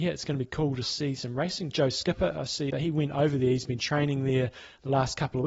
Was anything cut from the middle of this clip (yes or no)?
yes